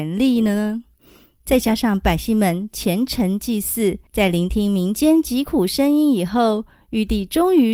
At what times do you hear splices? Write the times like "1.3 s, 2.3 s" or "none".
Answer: 4.1 s